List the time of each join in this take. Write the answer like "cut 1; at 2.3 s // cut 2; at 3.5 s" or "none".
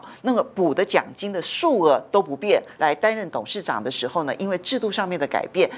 cut 1; at 2.8 s